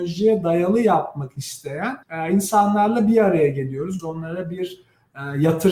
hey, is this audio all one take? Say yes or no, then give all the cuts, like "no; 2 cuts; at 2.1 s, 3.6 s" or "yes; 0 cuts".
no; 2 cuts; at 2.0 s, 4.0 s